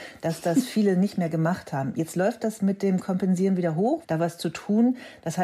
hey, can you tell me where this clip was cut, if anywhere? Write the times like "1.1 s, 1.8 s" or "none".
4.0 s

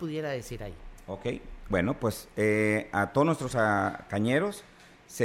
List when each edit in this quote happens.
none

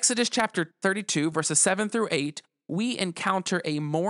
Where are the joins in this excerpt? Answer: none

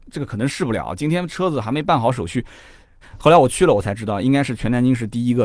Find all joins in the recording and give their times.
3.0 s

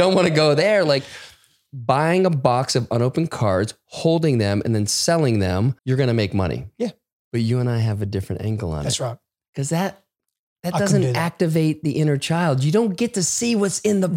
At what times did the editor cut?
5.8 s

